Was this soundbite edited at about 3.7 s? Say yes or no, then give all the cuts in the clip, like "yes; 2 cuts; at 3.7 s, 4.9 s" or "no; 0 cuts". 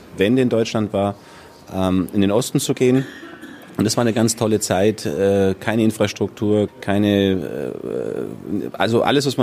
no; 1 cut; at 6.7 s